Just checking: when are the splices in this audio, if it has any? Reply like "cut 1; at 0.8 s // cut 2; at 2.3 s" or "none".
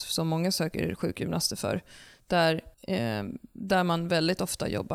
cut 1; at 2.7 s